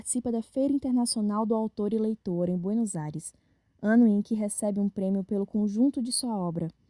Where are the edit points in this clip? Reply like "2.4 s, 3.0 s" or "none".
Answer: none